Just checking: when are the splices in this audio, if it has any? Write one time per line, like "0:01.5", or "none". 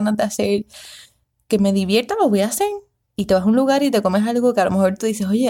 0:03.0